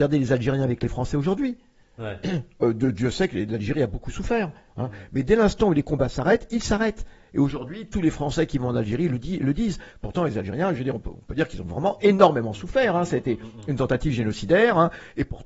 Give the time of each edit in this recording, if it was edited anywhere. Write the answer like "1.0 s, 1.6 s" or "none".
none